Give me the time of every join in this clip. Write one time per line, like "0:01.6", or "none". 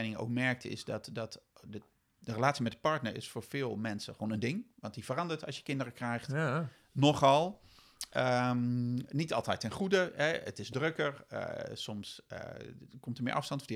none